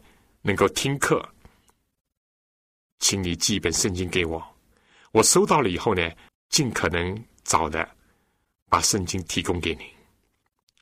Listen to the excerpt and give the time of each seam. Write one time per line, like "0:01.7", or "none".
0:06.3